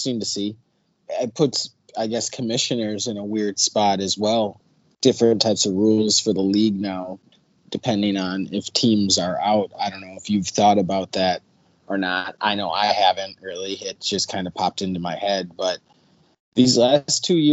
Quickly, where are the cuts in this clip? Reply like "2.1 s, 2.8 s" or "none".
none